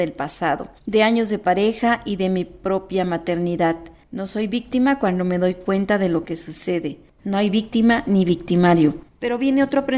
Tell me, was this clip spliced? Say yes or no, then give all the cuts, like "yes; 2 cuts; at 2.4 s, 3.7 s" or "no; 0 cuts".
no; 0 cuts